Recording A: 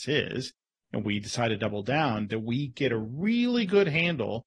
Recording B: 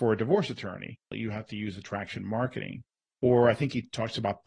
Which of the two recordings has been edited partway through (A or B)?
B